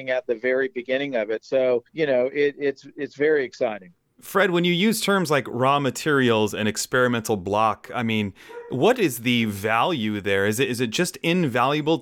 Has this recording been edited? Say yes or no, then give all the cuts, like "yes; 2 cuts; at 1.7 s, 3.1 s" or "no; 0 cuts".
yes; 1 cut; at 1.9 s